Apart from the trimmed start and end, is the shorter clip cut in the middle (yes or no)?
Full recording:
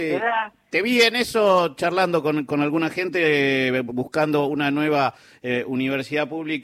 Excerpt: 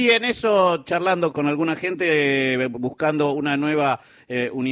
yes